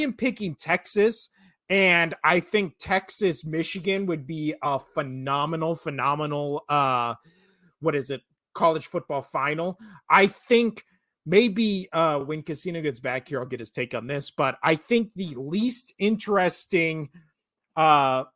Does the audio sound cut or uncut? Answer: uncut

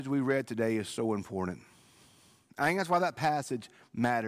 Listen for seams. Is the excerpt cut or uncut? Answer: uncut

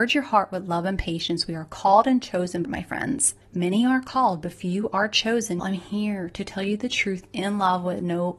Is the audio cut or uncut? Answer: cut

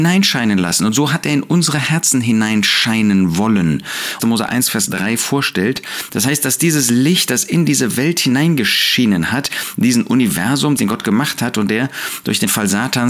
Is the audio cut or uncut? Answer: cut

